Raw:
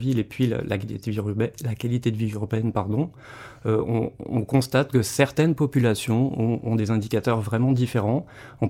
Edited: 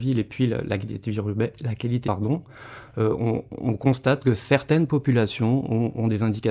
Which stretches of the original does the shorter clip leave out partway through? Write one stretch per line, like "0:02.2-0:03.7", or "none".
0:02.0-0:02.7